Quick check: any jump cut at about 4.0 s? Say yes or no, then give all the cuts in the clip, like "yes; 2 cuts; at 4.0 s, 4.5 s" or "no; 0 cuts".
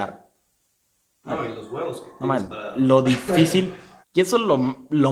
yes; 1 cut; at 4.0 s